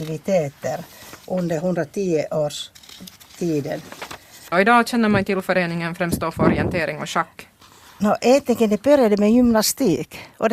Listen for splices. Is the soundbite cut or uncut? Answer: cut